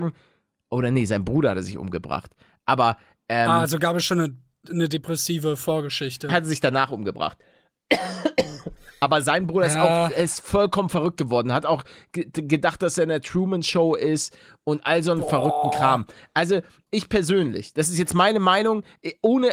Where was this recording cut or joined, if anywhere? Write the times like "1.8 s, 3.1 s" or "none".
6.3 s, 16.8 s